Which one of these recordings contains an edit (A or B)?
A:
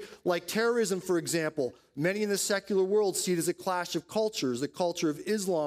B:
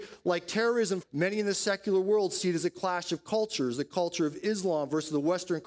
B